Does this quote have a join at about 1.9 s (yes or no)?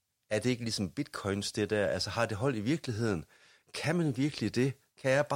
no